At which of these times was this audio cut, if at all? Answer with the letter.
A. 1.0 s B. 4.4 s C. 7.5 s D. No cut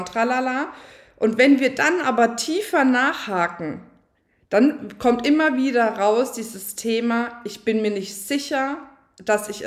D